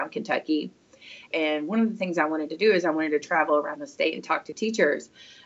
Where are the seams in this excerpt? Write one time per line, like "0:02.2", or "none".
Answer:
0:01.3